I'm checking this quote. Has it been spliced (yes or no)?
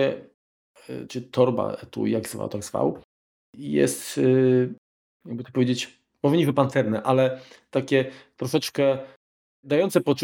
no